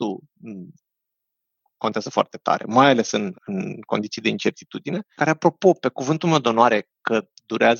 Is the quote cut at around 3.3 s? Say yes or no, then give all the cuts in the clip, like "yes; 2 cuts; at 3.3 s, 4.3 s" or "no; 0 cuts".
yes; 2 cuts; at 3.3 s, 5.1 s